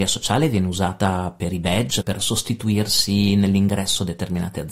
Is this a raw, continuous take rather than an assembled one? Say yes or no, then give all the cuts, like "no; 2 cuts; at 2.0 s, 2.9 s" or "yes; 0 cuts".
no; 1 cut; at 2.0 s